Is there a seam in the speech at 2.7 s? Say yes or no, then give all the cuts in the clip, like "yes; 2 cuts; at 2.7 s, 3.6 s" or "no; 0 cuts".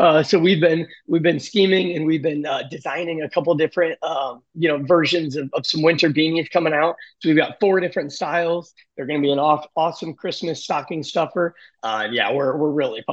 no; 0 cuts